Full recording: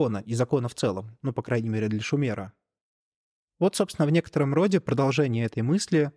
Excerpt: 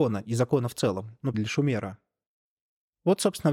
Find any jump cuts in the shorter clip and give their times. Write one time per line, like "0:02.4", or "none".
0:01.3